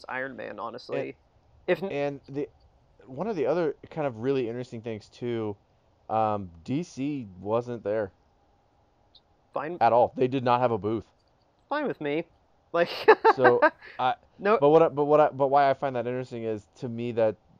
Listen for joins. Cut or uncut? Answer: uncut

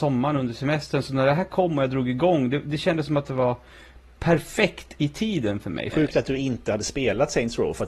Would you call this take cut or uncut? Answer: cut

